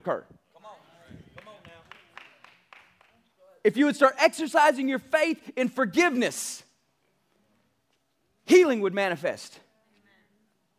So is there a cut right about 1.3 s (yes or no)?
no